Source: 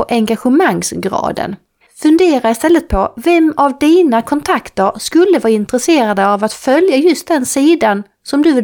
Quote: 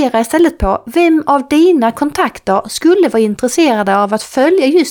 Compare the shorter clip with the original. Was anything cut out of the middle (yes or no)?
no